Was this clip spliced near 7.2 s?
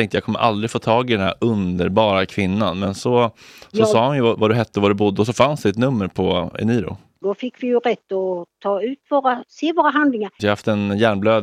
yes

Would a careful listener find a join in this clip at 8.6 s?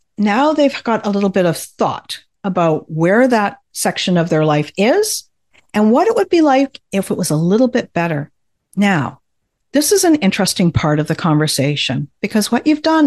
yes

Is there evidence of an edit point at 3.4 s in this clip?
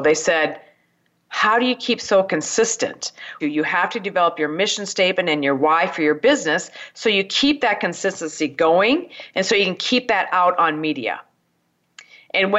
yes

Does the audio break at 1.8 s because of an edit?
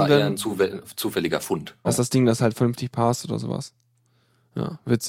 yes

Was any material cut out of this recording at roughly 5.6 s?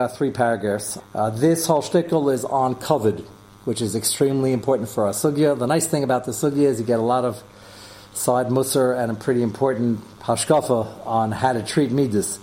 no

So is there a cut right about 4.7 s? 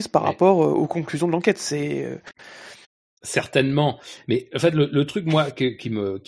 no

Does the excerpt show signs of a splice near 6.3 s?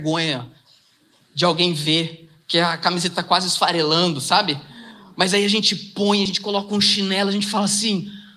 no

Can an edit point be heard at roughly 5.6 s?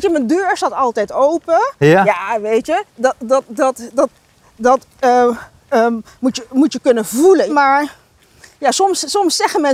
no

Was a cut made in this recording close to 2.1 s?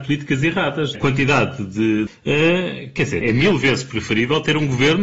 yes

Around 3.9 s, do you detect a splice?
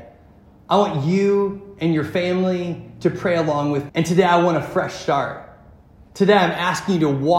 yes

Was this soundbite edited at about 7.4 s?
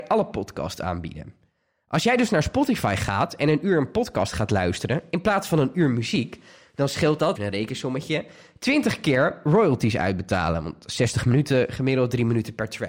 yes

